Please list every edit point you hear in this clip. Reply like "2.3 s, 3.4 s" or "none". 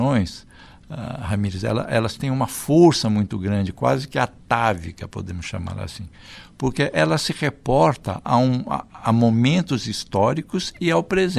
none